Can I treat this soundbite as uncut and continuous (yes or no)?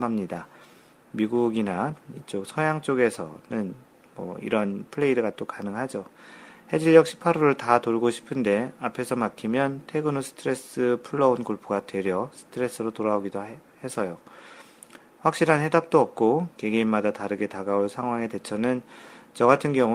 yes